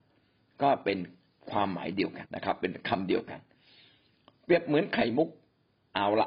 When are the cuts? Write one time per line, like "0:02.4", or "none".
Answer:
0:02.3